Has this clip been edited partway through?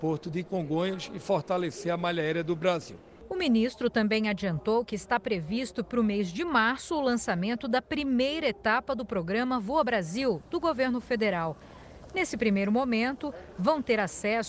no; 0 cuts

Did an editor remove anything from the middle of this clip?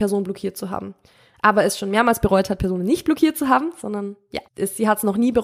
yes; 1 cut; at 4.5 s

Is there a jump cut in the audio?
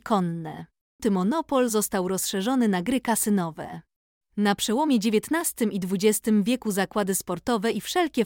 yes; 2 cuts; at 1.0 s, 4.2 s

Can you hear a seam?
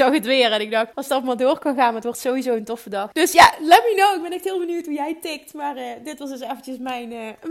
yes; 2 cuts; at 0.9 s, 3.1 s

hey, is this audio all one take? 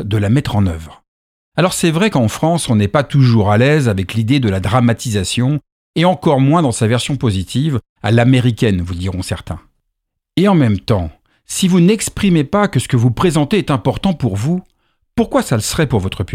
yes; 0 cuts

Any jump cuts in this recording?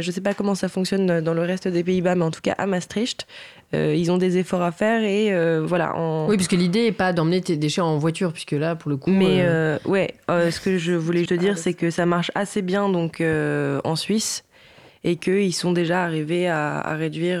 yes; 1 cut; at 11.3 s

